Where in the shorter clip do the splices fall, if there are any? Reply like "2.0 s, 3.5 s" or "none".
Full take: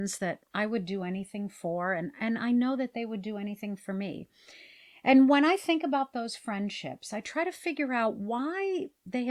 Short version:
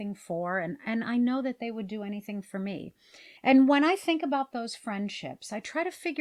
3.4 s